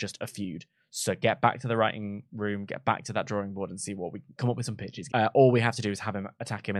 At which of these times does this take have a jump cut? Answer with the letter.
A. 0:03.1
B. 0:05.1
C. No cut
B